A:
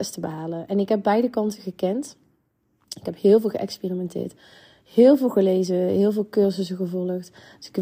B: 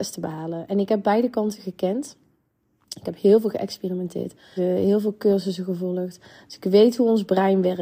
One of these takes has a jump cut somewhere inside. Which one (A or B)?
B